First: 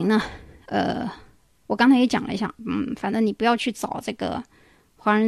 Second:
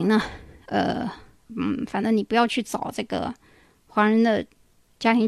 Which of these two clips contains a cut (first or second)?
second